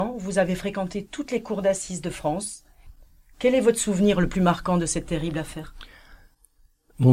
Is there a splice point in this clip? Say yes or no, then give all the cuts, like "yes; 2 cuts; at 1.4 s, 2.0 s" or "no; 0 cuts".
yes; 1 cut; at 3.3 s